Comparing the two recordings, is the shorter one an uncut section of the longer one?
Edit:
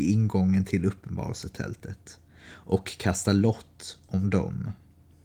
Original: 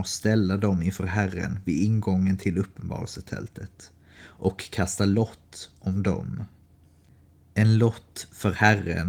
yes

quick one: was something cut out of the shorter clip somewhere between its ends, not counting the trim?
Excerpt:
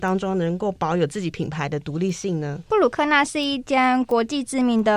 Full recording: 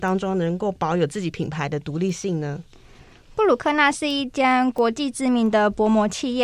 yes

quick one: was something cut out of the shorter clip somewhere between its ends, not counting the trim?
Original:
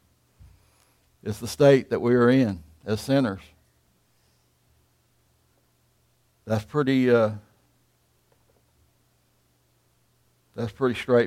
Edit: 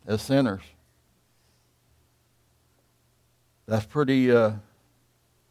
no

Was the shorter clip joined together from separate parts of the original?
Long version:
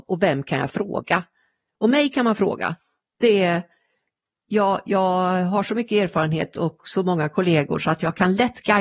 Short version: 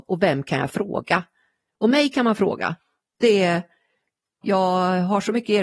yes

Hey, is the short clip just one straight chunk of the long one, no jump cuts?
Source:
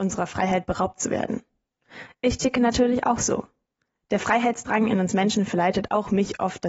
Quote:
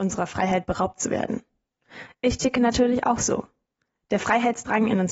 yes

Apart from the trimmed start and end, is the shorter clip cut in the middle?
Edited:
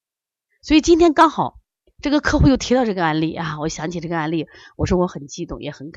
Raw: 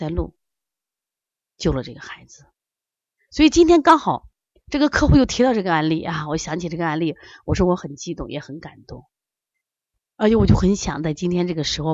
no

